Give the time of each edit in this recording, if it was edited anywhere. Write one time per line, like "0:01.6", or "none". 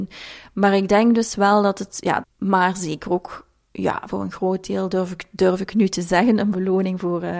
0:02.2